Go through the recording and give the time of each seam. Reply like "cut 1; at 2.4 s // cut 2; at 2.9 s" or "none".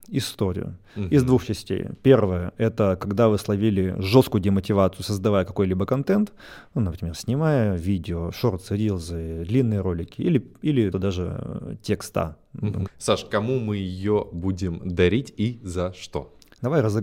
cut 1; at 10.9 s // cut 2; at 12.9 s